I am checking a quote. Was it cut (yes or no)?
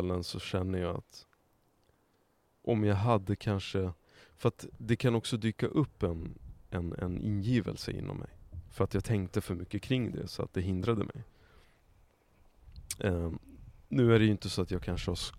yes